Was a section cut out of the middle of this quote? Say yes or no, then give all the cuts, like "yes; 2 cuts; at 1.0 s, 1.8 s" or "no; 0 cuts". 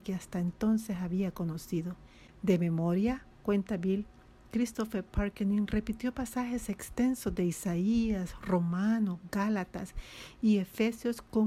no; 0 cuts